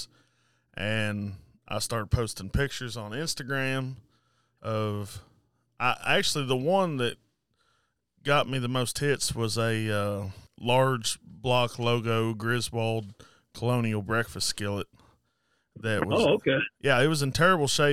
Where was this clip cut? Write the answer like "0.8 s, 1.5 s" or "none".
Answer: 10.5 s